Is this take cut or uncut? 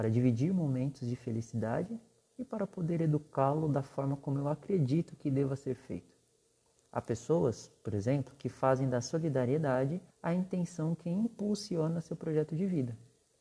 cut